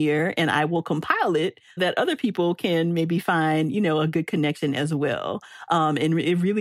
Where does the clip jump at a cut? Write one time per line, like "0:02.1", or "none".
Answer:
0:01.8